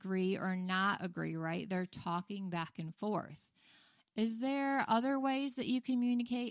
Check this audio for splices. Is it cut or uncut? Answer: uncut